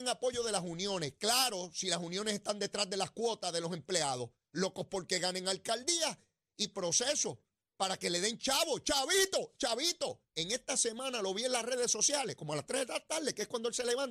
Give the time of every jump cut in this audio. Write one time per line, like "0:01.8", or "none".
0:10.3

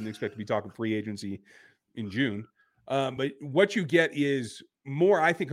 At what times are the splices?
none

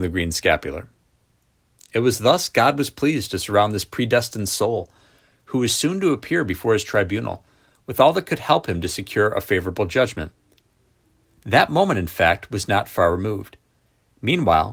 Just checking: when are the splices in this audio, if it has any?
none

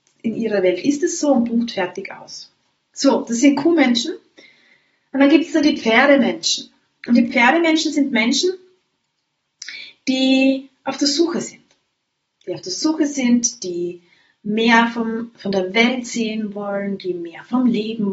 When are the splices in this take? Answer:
none

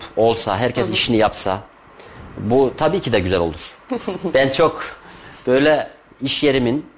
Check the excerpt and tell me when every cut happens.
0:03.9

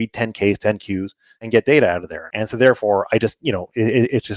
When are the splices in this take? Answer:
0:02.3

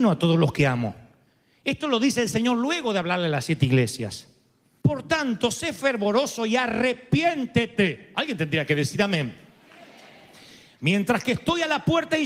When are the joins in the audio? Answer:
0:04.8

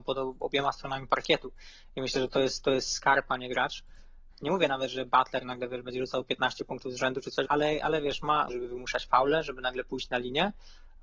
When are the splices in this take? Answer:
0:04.3
0:07.5
0:08.5

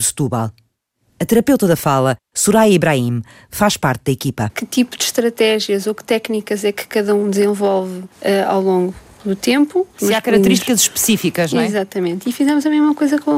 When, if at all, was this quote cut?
0:09.9

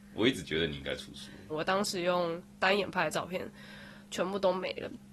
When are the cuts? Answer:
0:01.5

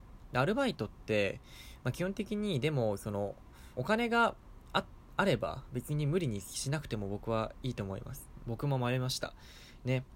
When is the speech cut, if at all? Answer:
0:03.7
0:08.4

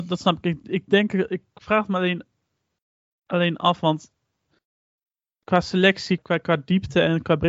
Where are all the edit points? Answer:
0:06.2

